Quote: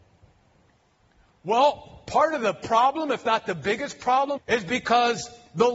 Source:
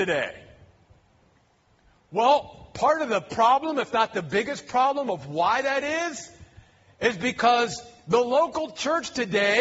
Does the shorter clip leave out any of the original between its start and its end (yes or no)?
yes